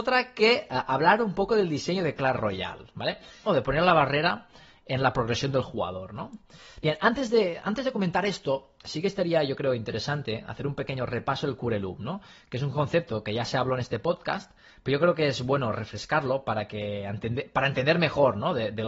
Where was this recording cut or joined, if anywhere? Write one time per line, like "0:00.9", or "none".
0:03.5